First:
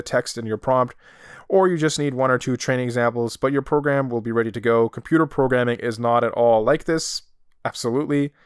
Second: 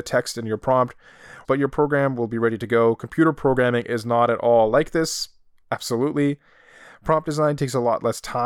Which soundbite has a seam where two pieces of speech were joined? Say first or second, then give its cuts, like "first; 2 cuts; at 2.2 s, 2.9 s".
second; 1 cut; at 1.4 s